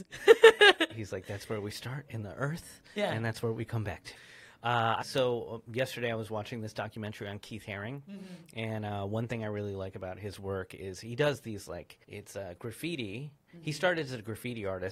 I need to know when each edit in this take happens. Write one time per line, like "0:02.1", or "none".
0:05.0
0:12.0